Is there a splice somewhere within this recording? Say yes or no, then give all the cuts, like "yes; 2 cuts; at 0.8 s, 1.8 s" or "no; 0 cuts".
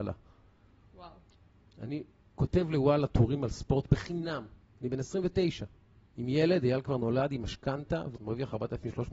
yes; 2 cuts; at 4.7 s, 8.1 s